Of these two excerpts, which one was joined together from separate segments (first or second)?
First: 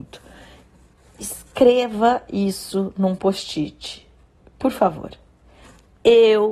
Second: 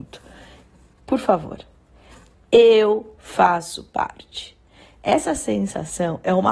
second